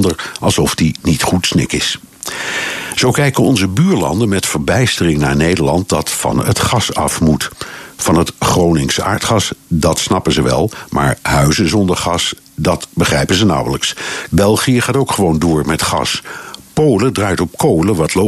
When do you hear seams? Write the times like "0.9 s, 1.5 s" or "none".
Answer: 14.3 s